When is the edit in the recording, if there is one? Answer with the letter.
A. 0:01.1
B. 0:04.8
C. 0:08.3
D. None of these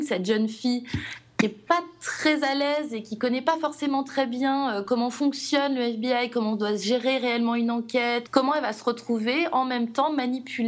C